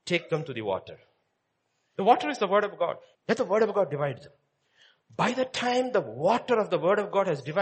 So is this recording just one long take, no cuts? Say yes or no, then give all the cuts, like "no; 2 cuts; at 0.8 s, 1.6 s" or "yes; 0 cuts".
no; 1 cut; at 3.1 s